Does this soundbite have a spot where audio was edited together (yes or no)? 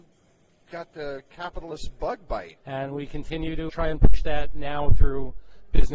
yes